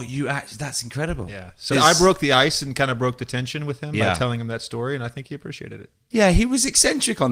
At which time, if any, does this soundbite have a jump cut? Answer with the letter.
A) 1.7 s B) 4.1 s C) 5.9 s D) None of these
A